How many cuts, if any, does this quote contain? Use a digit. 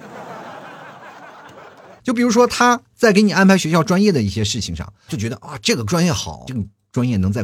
3